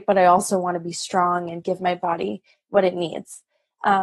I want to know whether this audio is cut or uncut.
uncut